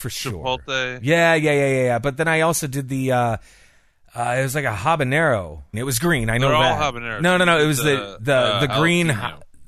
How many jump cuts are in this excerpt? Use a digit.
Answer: 1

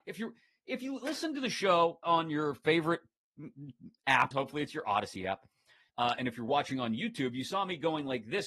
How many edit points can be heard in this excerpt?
3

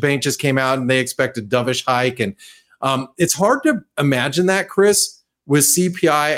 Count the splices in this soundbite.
0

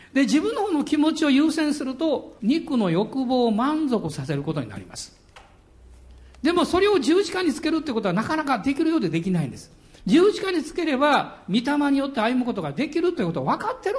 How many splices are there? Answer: 1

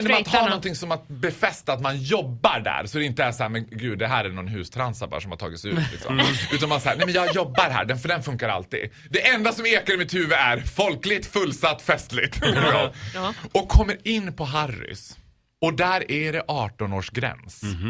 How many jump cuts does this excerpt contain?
0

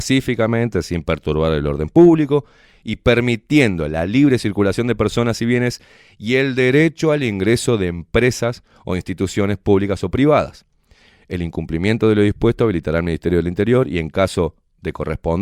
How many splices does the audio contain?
0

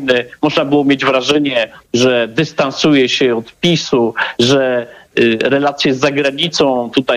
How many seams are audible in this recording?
1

